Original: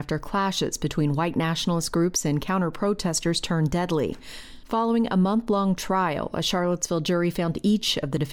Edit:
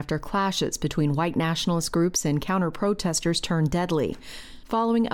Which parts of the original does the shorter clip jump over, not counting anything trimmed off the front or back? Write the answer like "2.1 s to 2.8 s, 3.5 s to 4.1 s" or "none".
none